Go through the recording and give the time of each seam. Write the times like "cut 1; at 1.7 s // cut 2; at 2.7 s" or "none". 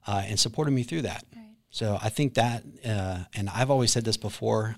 none